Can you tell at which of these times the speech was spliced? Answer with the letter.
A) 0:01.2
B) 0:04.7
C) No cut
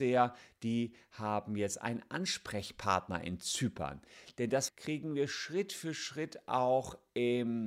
B